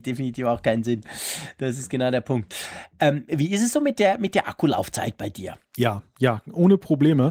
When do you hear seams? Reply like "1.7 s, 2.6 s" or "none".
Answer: 5.6 s